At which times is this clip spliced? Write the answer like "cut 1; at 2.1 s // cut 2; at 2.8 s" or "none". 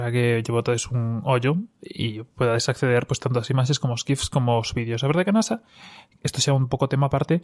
none